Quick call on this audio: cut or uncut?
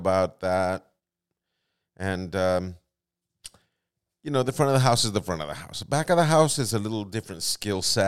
uncut